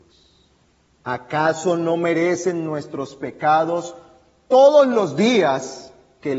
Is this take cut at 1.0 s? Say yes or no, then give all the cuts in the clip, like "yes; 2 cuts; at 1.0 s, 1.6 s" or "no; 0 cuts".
yes; 1 cut; at 1.0 s